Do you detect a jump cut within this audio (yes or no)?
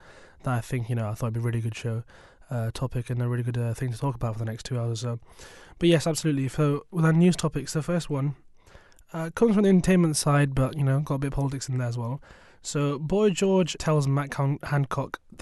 yes